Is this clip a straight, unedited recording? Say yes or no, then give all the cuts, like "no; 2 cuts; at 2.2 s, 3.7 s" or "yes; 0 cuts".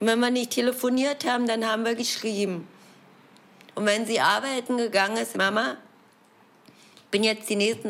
no; 1 cut; at 5.3 s